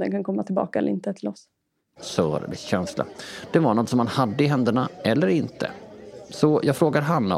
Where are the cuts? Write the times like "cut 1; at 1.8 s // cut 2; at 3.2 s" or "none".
cut 1; at 2.0 s